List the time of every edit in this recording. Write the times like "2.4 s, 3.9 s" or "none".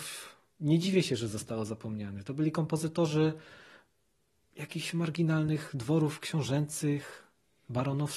none